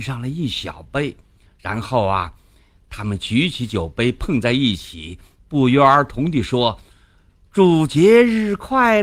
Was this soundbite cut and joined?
no; 0 cuts

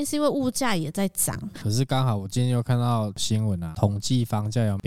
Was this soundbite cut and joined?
yes; 1 cut; at 1.5 s

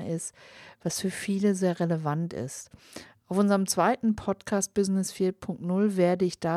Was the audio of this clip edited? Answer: no; 0 cuts

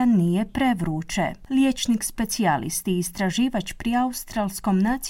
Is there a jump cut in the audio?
no; 0 cuts

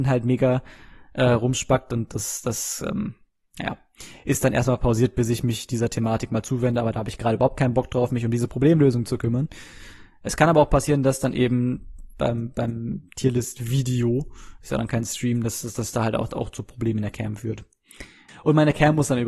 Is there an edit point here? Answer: yes; 1 cut; at 18.3 s

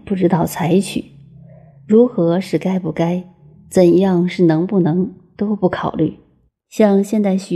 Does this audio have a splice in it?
yes; 1 cut; at 6.5 s

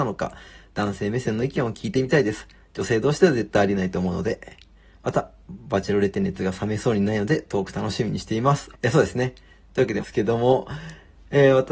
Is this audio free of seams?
no; 2 cuts; at 8.7 s, 10.0 s

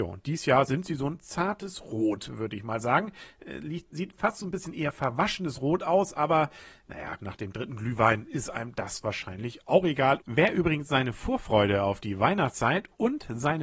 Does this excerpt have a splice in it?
yes; 2 cuts; at 7.2 s, 10.2 s

